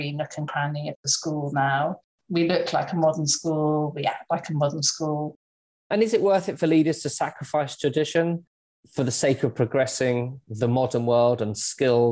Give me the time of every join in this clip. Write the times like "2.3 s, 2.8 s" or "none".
5.7 s